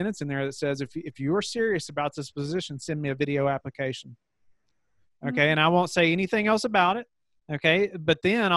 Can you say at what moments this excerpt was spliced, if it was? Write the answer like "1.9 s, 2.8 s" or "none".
none